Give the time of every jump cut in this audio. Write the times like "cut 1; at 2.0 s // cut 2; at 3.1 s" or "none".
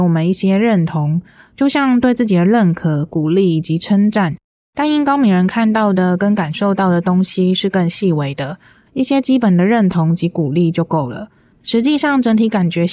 cut 1; at 4.6 s // cut 2; at 8.9 s // cut 3; at 11.5 s